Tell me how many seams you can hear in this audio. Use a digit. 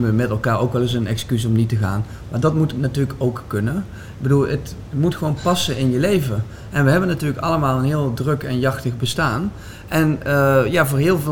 0